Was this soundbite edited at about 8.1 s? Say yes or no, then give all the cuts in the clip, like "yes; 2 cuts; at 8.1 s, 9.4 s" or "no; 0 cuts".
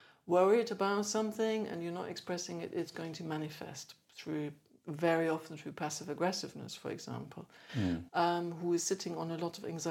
yes; 1 cut; at 8.1 s